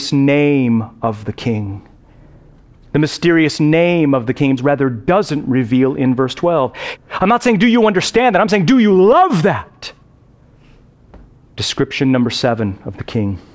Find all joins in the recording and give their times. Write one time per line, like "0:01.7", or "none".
0:04.6
0:07.0
0:11.5